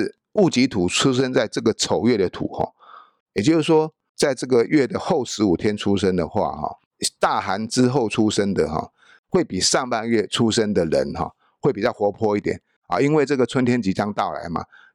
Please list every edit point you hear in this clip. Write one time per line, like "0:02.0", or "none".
0:03.2